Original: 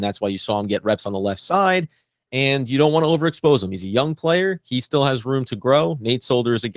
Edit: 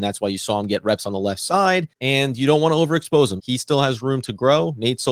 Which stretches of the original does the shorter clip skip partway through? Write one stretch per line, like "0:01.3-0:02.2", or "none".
0:01.9-0:02.2
0:03.7-0:04.6